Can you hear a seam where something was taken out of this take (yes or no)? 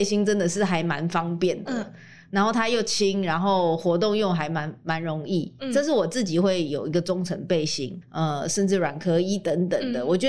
yes